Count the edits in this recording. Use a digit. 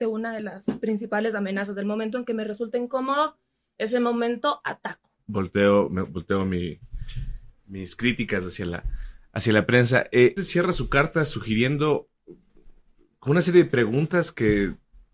1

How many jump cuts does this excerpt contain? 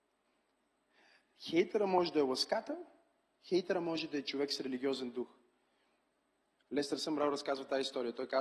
0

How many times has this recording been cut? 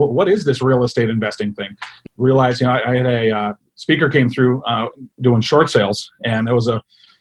2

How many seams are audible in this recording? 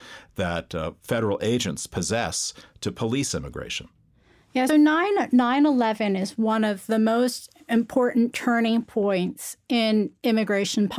1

